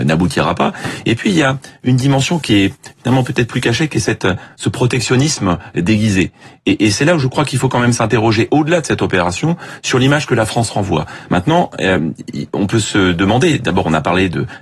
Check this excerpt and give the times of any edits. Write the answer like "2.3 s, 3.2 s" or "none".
11.3 s